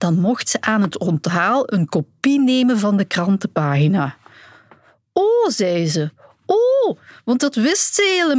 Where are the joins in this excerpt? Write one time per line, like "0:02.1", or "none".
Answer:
none